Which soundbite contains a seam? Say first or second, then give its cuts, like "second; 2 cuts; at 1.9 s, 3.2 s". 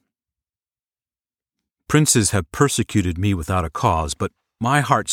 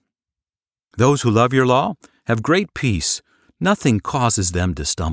second; 1 cut; at 0.9 s